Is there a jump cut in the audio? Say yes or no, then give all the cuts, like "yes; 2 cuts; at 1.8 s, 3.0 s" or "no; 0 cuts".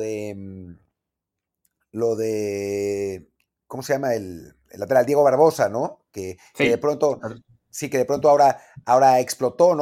no; 0 cuts